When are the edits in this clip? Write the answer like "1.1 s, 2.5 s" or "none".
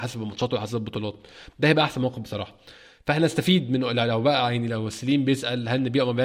none